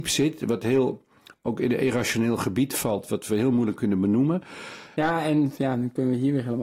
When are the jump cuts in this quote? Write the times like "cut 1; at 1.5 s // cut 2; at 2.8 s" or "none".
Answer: cut 1; at 5.0 s